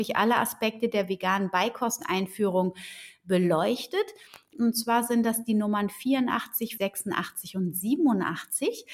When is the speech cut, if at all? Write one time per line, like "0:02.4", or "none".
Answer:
0:04.5
0:06.8